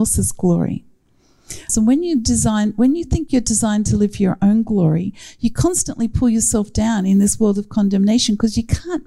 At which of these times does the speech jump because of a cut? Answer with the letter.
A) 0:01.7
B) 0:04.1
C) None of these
A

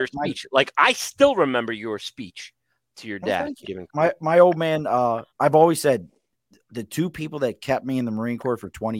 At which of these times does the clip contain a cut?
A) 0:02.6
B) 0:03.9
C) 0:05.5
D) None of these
B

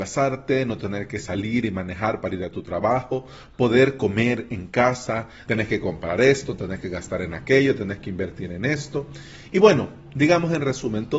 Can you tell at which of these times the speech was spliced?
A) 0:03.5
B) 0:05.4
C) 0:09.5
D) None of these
B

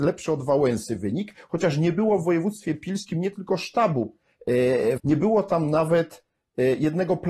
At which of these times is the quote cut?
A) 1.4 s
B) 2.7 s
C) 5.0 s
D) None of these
C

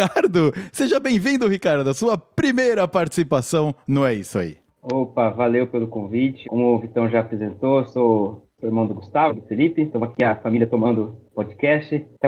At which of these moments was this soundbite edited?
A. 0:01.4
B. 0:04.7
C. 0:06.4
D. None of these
C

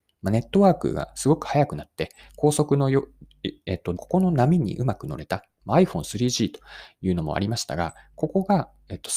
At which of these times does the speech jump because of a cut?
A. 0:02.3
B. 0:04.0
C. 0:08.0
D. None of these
B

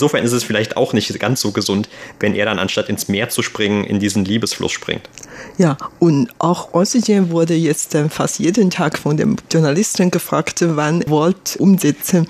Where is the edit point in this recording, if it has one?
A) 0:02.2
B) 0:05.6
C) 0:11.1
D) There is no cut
C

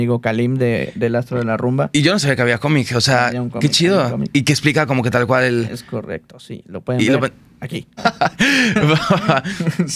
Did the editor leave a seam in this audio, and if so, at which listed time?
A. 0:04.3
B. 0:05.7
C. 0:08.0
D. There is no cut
C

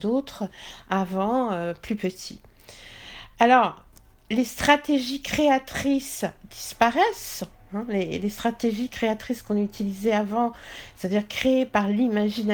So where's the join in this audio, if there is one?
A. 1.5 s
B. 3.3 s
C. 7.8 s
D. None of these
D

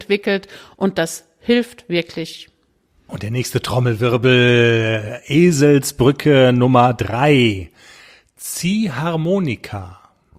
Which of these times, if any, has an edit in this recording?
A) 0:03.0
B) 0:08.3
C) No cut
C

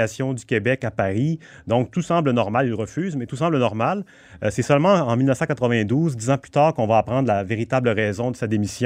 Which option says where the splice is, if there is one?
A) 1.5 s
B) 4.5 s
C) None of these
C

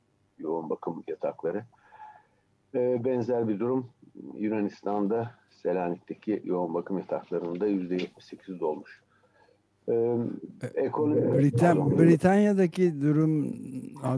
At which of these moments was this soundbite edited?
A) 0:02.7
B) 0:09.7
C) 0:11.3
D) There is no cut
D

